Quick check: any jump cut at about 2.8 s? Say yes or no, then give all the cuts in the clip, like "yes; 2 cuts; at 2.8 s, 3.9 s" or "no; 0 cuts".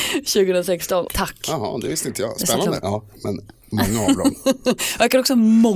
yes; 2 cuts; at 1.1 s, 2.8 s